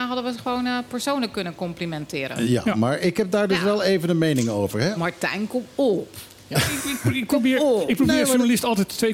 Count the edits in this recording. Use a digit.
1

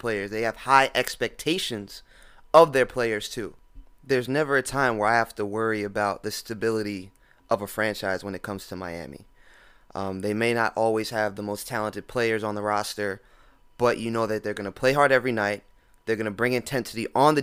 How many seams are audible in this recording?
0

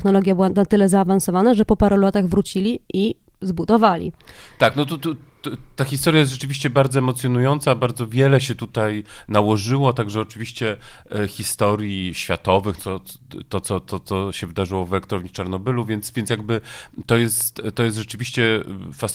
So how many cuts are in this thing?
2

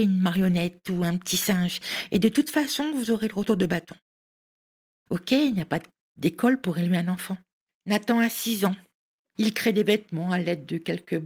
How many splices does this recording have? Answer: 3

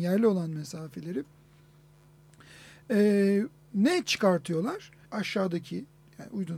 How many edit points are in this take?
1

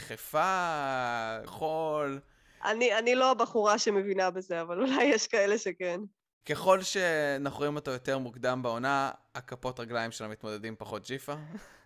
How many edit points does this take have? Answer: 2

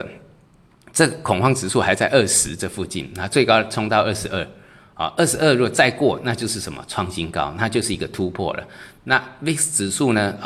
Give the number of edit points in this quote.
0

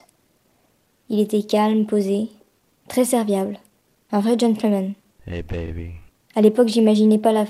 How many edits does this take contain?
0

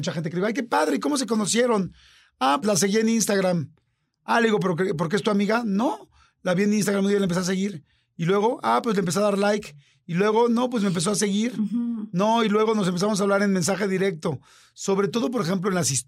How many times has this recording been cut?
1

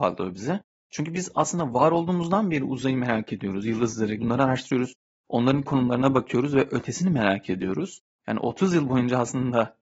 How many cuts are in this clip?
2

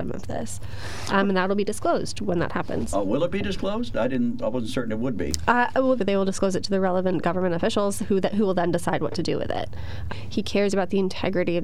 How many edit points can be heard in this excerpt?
2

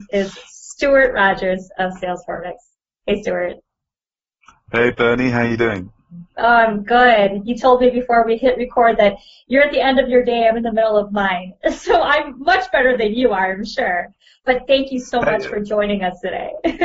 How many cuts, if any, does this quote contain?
0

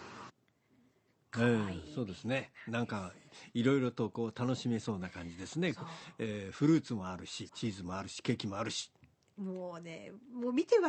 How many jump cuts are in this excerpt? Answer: 1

